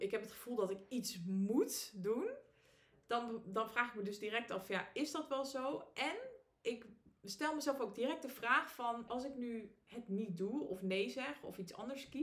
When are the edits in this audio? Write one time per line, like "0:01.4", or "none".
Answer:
0:09.1